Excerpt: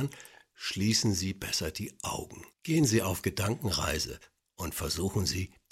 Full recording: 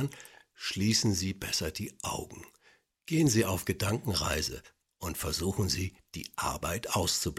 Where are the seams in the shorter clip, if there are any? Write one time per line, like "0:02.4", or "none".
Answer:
0:02.5